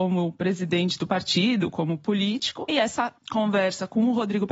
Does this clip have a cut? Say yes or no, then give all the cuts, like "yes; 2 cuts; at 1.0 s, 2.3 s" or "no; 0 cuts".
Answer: yes; 1 cut; at 2.7 s